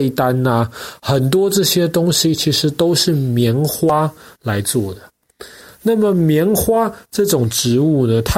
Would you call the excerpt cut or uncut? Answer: uncut